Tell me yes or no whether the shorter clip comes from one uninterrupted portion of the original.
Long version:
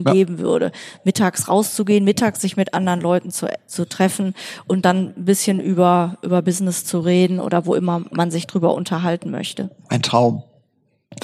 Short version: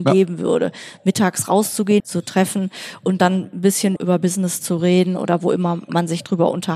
no